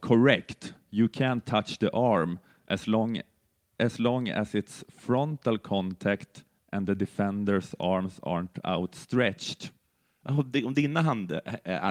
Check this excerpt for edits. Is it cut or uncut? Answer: uncut